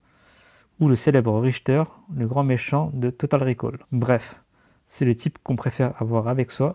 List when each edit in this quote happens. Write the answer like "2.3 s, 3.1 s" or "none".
3.8 s